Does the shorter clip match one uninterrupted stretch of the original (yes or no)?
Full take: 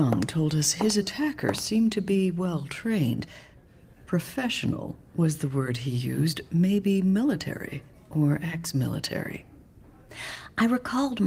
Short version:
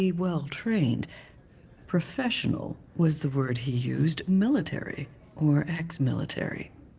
no